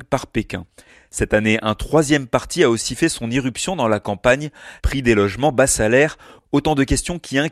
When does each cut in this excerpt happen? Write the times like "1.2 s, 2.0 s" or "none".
4.8 s